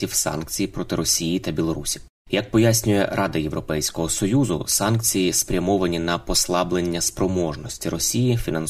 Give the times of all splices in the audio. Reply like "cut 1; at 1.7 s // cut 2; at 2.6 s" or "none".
none